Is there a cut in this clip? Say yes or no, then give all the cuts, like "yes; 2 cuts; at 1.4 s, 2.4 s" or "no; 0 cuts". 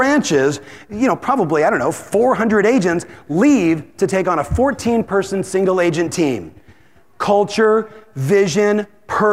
no; 0 cuts